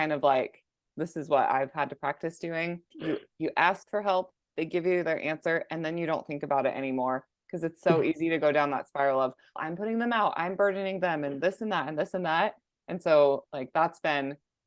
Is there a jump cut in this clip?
yes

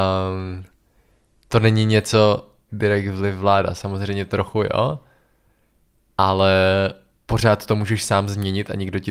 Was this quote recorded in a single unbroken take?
no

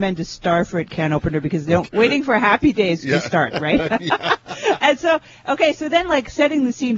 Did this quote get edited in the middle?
yes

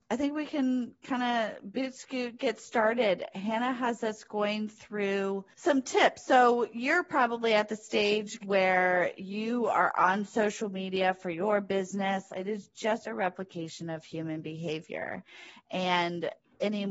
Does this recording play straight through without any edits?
no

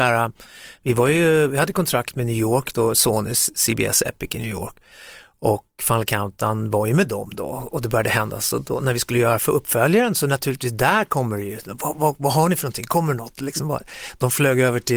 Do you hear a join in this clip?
no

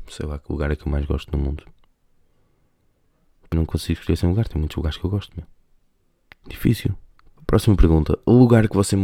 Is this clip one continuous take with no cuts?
no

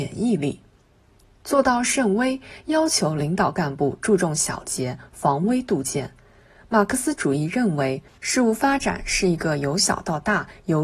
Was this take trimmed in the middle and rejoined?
no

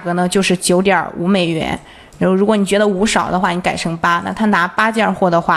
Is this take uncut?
yes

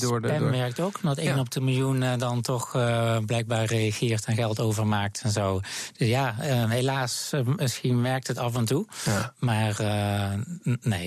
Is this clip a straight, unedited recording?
yes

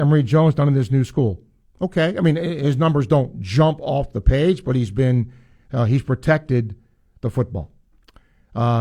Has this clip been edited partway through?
yes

